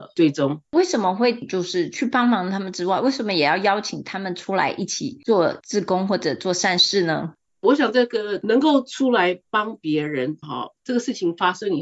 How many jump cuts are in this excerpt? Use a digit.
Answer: 1